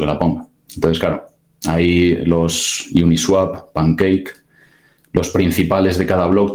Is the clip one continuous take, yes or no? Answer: yes